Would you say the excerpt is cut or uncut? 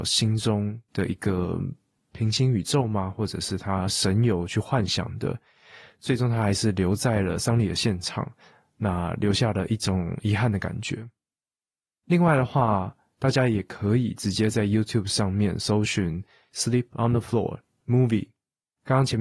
uncut